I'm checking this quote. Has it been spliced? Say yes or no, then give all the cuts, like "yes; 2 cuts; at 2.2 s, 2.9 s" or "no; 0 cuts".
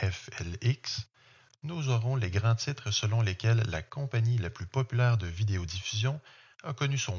no; 0 cuts